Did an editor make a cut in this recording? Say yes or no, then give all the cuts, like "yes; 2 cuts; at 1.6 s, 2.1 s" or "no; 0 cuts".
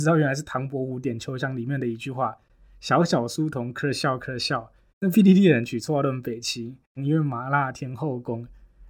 yes; 2 cuts; at 4.9 s, 7.0 s